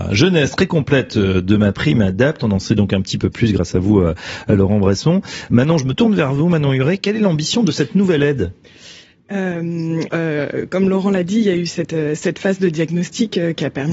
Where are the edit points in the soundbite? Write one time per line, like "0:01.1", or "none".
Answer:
0:10.1